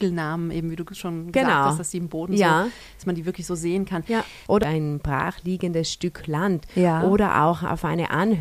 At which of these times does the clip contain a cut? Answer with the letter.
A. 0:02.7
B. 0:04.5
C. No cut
B